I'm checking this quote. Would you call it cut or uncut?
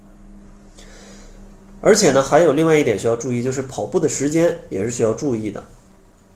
uncut